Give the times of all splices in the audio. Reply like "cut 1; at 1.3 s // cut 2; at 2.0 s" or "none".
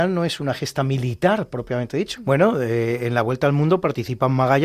cut 1; at 2.2 s